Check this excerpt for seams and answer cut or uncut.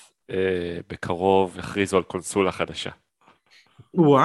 uncut